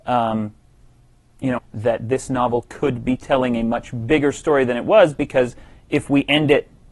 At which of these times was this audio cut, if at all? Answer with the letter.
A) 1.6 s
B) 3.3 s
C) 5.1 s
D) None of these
A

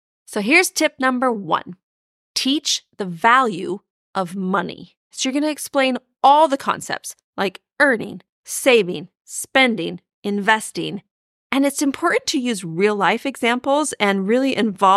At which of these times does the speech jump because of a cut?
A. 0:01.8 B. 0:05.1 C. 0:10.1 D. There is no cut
B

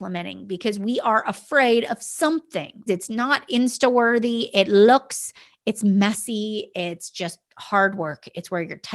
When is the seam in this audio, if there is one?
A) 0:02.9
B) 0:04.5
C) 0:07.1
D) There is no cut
A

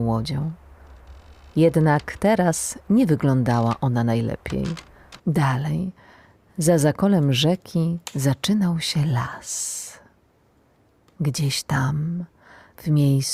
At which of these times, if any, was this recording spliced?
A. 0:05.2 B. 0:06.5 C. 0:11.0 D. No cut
A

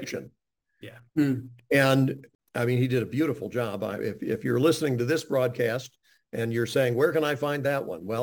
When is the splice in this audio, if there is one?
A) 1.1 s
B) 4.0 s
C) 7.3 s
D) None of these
A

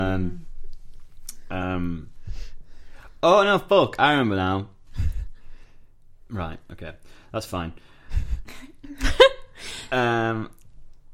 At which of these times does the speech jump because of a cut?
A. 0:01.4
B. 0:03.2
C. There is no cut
C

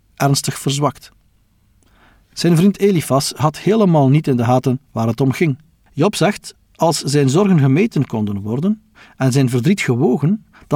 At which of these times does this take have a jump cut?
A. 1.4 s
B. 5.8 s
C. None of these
B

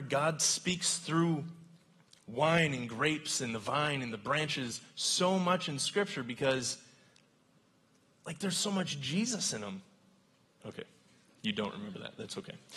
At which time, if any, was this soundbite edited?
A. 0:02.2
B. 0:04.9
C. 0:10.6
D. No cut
C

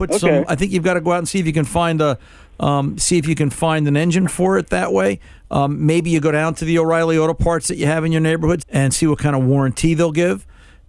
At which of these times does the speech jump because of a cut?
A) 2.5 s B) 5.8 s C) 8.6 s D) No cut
C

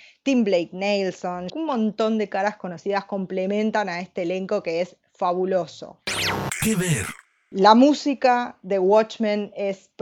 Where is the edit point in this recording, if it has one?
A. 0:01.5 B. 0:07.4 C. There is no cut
A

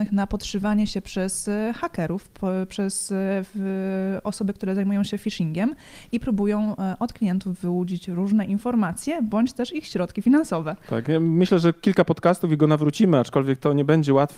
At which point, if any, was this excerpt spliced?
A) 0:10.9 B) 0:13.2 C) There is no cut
A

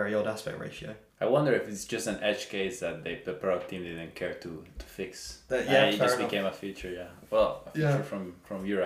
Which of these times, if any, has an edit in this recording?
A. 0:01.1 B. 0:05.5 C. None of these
B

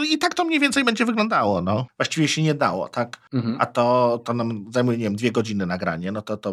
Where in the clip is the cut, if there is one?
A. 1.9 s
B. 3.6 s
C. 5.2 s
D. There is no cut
A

